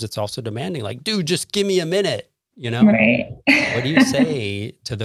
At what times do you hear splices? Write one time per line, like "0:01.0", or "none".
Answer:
none